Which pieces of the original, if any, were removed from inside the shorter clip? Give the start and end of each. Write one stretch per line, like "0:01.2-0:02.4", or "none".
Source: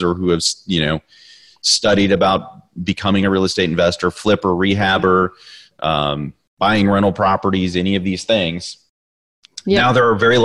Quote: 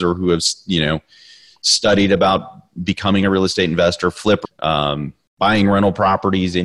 0:04.4-0:05.6